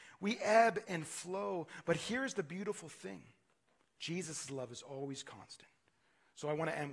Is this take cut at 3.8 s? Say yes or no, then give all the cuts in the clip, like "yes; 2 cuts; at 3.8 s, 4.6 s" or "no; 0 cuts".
yes; 1 cut; at 3.8 s